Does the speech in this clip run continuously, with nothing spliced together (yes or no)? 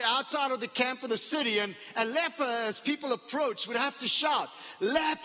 yes